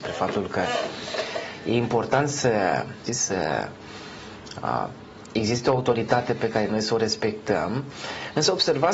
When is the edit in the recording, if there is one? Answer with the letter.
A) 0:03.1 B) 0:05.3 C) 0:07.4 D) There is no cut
A